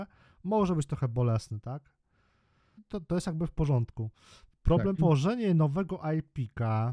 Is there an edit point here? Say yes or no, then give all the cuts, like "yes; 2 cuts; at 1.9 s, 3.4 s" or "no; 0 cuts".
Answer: yes; 2 cuts; at 2.8 s, 5.0 s